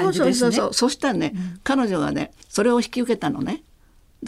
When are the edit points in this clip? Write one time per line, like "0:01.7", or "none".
0:02.4